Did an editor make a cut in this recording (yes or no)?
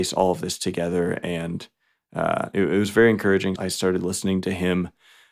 yes